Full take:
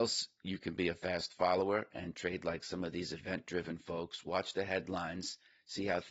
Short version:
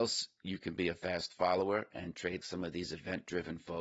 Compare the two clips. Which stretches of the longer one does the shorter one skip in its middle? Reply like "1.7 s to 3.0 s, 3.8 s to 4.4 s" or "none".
2.4 s to 2.6 s